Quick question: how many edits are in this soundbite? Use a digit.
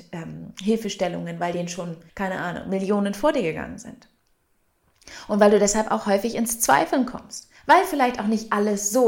1